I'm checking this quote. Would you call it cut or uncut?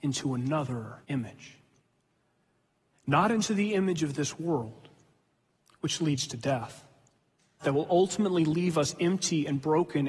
cut